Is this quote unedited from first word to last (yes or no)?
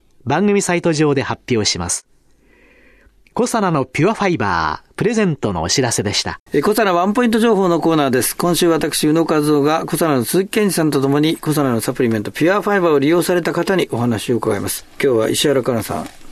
no